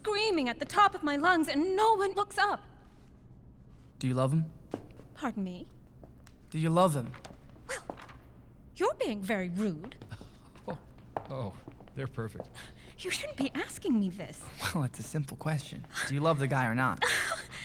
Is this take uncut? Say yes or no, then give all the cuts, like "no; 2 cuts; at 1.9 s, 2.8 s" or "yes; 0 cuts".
no; 1 cut; at 2.1 s